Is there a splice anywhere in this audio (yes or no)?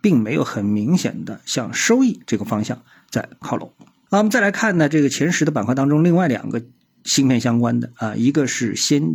no